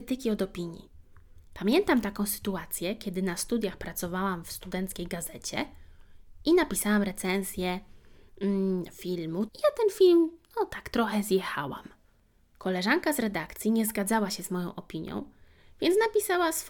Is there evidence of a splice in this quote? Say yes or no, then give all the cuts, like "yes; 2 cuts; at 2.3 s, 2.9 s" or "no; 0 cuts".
yes; 1 cut; at 9.5 s